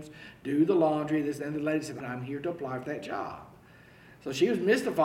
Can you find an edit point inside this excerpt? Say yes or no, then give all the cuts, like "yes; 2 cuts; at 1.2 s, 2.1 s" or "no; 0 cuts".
yes; 1 cut; at 2.0 s